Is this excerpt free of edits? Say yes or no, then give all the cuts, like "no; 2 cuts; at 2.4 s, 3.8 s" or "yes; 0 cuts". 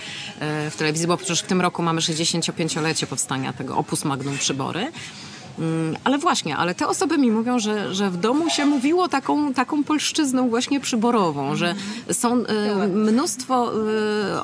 yes; 0 cuts